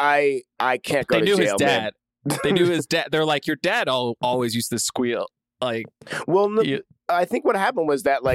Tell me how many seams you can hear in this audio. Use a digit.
0